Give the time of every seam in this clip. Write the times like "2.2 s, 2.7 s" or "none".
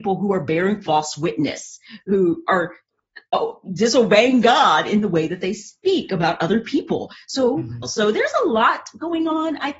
7.8 s